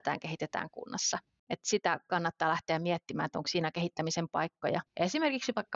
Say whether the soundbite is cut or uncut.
cut